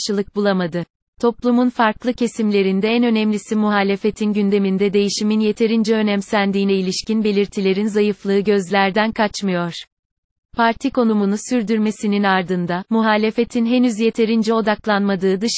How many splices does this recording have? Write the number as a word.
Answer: one